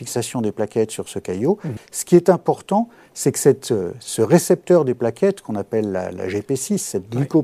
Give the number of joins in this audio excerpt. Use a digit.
1